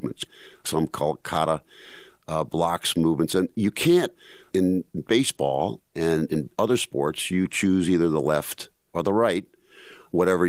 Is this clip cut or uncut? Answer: uncut